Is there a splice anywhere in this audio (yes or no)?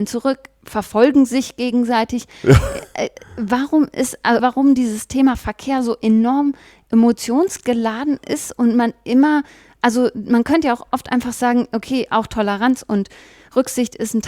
yes